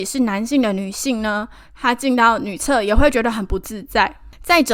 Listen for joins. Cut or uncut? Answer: uncut